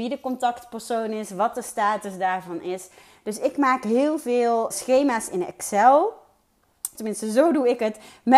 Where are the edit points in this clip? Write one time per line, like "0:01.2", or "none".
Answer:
0:04.7
0:06.9